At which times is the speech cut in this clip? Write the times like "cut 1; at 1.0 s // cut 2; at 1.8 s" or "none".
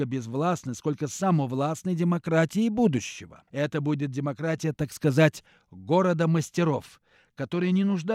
cut 1; at 3.5 s